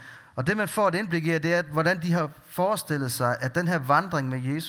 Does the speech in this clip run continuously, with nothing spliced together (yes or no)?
yes